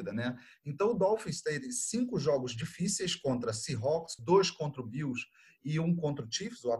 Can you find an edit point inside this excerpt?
yes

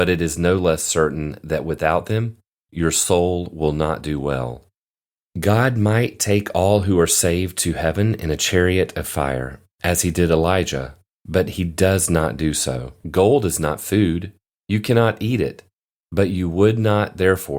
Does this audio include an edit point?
yes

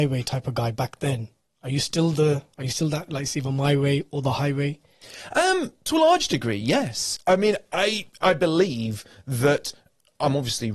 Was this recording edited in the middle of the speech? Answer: no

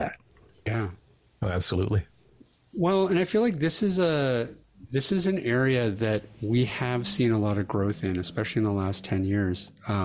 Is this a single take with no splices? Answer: yes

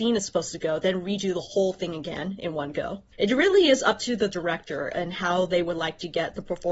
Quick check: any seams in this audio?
yes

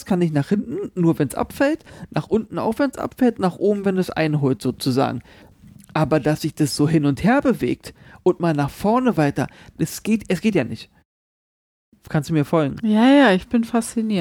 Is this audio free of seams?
yes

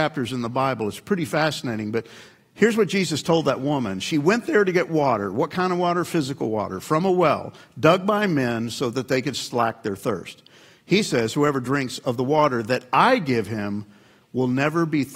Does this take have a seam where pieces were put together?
no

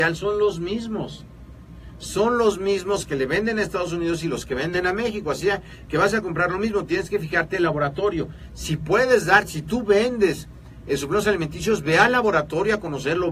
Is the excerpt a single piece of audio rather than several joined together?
yes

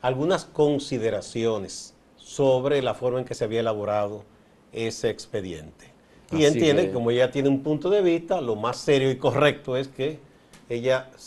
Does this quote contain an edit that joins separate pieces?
no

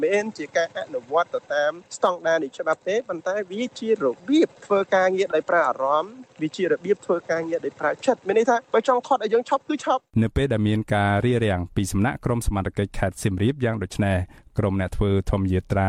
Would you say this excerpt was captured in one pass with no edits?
no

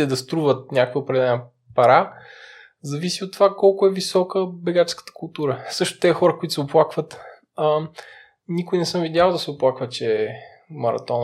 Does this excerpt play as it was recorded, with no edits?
yes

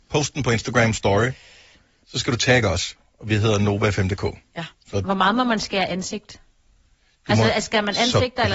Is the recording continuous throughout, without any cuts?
yes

